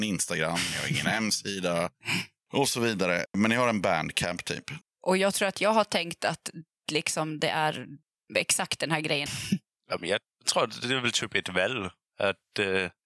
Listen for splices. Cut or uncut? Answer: cut